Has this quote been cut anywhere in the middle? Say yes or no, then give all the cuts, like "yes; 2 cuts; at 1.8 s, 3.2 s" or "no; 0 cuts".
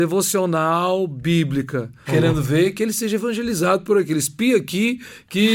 yes; 1 cut; at 2.1 s